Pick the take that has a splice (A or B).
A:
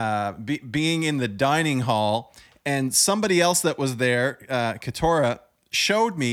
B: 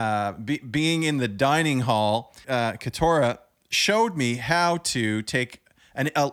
B